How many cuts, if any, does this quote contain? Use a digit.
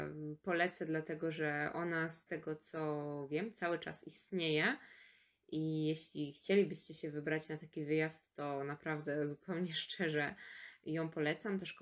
0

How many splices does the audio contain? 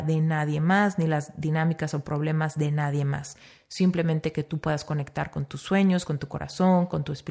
0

